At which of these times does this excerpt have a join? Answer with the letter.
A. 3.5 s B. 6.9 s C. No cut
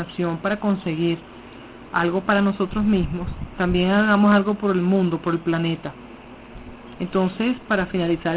B